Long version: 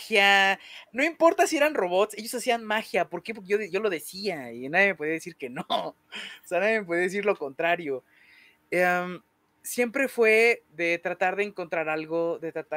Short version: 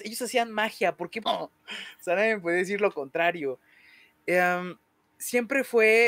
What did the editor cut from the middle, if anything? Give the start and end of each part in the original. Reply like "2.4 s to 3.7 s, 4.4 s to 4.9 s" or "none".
3.3 s to 5.7 s